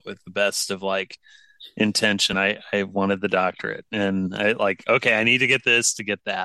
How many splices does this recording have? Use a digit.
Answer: 0